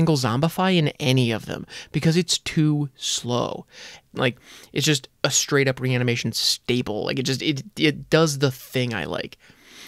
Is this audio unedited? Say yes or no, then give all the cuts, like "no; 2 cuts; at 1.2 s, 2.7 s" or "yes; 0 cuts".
no; 1 cut; at 4.1 s